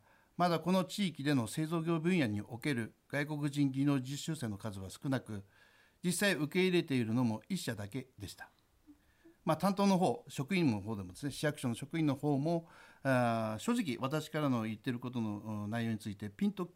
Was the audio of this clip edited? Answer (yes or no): no